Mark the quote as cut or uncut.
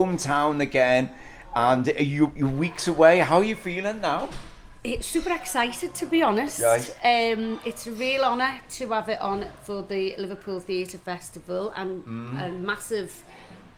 uncut